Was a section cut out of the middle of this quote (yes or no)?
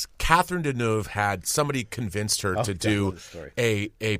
no